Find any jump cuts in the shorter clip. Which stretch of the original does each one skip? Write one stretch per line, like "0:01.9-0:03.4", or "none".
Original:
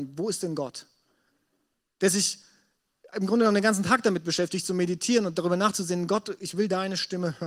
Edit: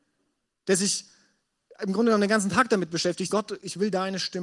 0:04.6-0:06.1